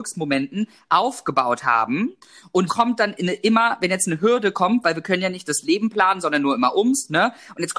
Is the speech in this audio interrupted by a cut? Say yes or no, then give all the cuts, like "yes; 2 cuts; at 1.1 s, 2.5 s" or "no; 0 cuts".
yes; 1 cut; at 2.7 s